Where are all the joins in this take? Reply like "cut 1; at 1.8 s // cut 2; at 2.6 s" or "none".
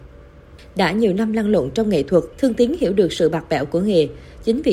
cut 1; at 2.3 s